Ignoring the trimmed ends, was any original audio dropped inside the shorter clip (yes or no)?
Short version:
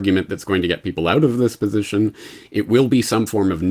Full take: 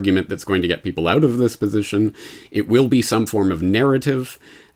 no